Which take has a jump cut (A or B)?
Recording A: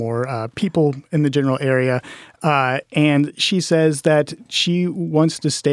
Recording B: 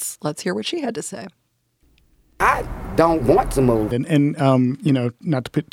B